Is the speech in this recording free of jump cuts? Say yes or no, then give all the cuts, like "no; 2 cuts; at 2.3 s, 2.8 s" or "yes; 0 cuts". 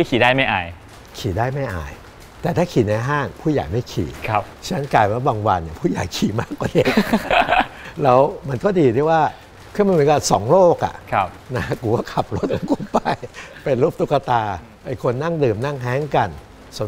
no; 1 cut; at 14.7 s